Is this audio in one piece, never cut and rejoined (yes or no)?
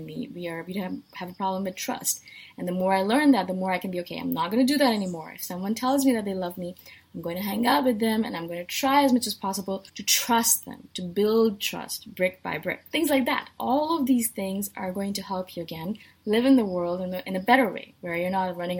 no